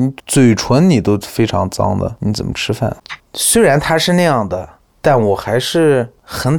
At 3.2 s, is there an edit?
yes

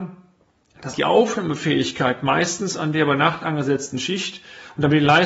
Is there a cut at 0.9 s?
yes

